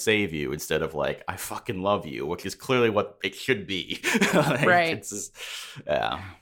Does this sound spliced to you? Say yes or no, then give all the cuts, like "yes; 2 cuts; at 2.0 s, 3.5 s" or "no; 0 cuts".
no; 0 cuts